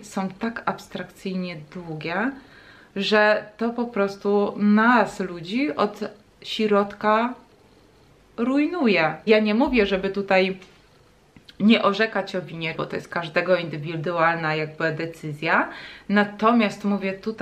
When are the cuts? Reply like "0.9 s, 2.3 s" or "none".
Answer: 9.3 s, 12.7 s